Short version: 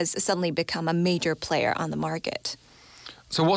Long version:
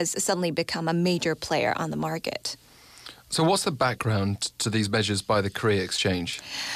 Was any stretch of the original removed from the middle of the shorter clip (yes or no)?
no